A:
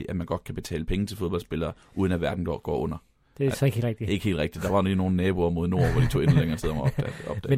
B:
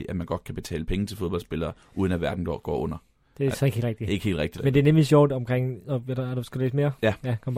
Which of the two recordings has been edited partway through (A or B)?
B